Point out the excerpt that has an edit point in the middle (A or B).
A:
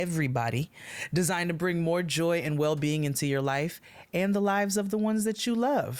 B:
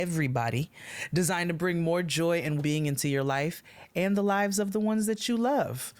B